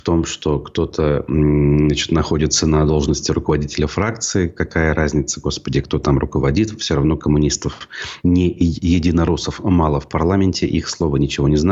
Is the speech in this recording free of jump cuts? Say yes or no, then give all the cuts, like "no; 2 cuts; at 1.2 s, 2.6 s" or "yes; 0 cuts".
no; 1 cut; at 8.2 s